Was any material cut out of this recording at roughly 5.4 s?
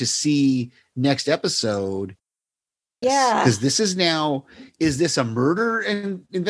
no; 1 cut; at 3.0 s

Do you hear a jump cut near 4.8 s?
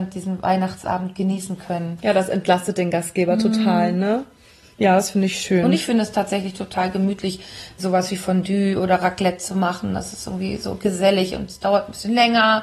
no; 1 cut; at 7.8 s

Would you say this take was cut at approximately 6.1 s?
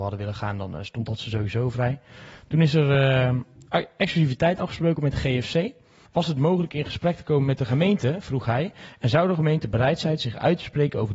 yes; 1 cut; at 6.1 s

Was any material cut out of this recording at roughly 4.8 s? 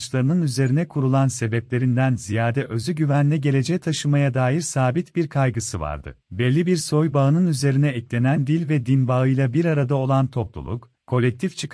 no; 1 cut; at 6.2 s

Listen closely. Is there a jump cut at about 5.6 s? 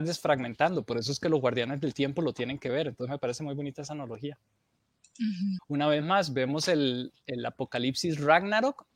yes; 1 cut; at 5.6 s

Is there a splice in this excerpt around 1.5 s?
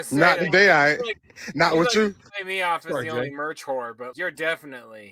no; 1 cut; at 4.1 s

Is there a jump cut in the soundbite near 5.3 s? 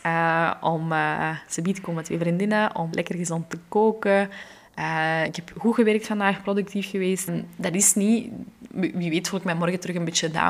no; 2 cuts; at 2.9 s, 7.3 s

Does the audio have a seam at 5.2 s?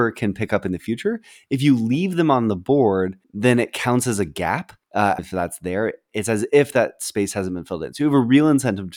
yes; 1 cut; at 5.2 s

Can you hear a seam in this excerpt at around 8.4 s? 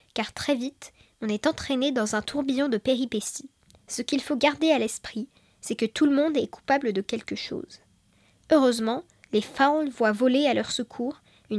no; 1 cut; at 3.8 s

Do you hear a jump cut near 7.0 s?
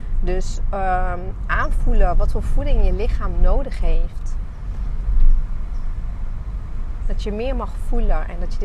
yes; 1 cut; at 7.0 s

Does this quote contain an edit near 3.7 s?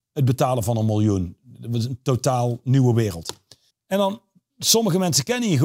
yes; 1 cut; at 3.7 s

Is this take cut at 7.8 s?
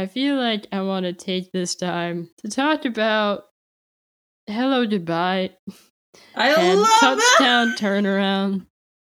no; 1 cut; at 2.3 s

